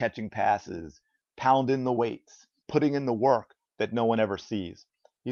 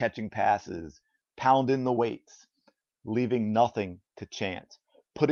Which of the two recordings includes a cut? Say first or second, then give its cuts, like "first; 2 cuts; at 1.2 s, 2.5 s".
first; 1 cut; at 2.6 s